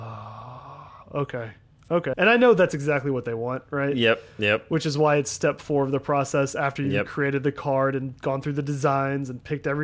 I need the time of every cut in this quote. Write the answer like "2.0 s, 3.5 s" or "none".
2.1 s